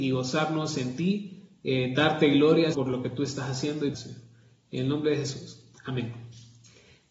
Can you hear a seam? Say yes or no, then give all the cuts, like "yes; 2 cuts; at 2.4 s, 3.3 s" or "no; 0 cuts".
yes; 2 cuts; at 2.7 s, 3.9 s